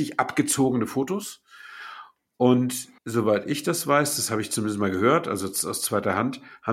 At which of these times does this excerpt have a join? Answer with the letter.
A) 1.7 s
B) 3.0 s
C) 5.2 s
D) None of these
B